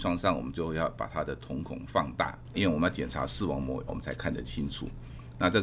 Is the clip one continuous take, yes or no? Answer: no